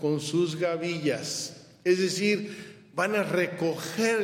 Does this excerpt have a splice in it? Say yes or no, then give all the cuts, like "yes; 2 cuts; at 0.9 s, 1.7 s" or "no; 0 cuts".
no; 0 cuts